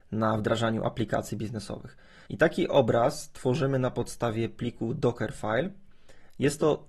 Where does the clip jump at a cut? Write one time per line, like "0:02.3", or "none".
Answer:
0:02.3